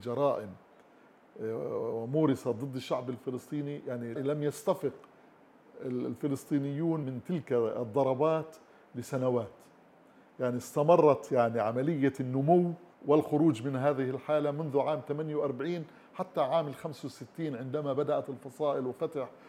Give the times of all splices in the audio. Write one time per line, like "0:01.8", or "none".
0:04.2
0:07.0
0:12.9